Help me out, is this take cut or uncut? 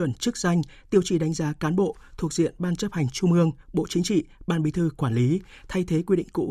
uncut